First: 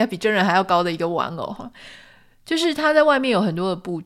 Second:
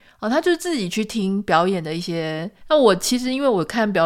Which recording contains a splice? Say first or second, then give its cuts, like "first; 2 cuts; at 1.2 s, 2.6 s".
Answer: second; 1 cut; at 2.6 s